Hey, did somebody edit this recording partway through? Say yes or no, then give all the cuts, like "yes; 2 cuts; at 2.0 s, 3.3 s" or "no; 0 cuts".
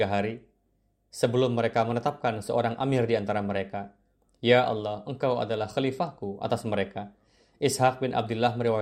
no; 0 cuts